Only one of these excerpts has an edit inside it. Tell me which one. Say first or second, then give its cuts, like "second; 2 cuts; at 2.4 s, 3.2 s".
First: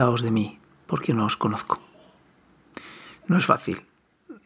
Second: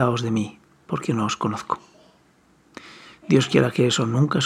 first; 1 cut; at 3.2 s